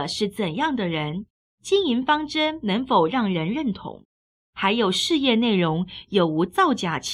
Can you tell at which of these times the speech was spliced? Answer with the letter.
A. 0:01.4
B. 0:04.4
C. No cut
C